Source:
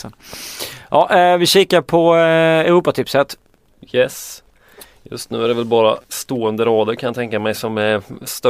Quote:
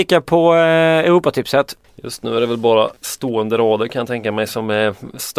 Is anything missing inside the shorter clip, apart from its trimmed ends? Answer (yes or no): yes